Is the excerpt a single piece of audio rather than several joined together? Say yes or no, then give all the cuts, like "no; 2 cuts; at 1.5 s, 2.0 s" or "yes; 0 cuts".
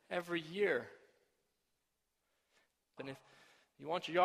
no; 1 cut; at 3.0 s